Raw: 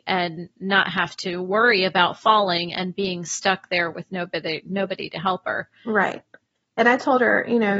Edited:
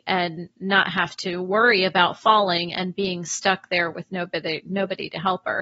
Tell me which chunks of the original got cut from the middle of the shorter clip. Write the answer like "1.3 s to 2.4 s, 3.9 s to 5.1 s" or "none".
none